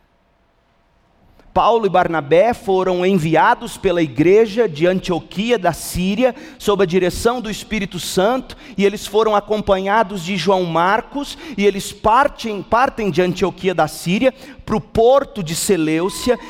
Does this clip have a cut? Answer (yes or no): no